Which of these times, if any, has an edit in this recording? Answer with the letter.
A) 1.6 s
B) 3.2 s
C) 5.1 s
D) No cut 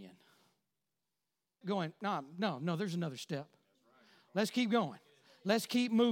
A